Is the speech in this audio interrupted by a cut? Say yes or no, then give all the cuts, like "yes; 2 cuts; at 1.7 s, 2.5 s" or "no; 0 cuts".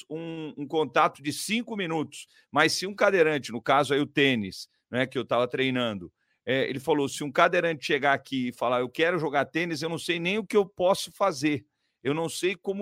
no; 0 cuts